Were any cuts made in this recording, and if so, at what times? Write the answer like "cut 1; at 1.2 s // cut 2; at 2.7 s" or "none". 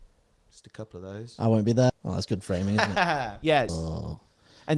cut 1; at 1.9 s // cut 2; at 3.7 s